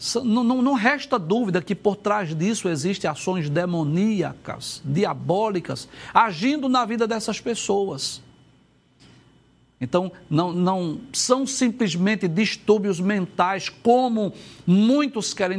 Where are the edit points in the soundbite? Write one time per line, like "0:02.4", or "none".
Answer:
0:10.5